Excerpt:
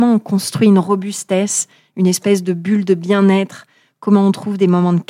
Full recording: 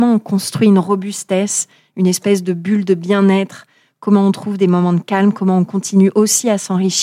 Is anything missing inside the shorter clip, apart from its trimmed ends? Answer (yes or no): no